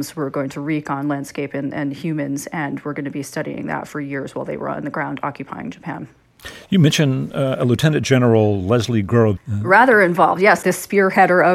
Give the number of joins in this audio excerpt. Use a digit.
2